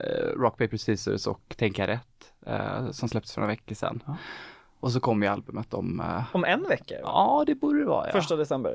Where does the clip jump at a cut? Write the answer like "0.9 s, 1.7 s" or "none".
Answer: none